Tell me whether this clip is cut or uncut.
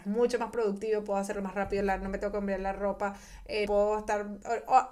cut